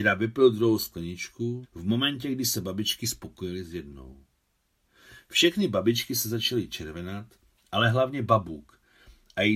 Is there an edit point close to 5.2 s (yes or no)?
no